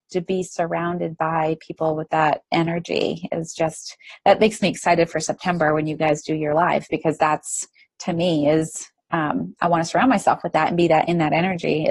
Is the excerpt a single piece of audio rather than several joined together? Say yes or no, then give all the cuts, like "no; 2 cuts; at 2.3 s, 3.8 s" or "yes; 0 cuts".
yes; 0 cuts